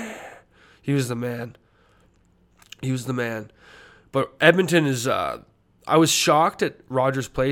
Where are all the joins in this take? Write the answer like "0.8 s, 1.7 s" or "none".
none